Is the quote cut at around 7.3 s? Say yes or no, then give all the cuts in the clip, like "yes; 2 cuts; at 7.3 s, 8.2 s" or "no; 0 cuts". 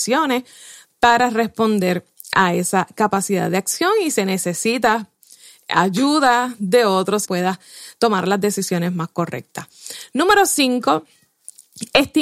yes; 1 cut; at 7.3 s